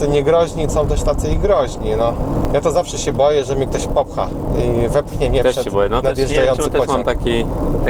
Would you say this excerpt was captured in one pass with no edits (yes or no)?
yes